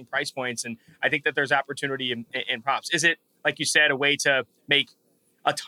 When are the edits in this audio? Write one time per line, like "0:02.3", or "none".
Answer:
none